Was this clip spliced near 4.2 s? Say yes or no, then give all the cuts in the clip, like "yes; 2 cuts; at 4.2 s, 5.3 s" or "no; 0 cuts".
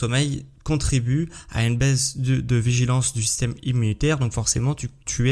no; 0 cuts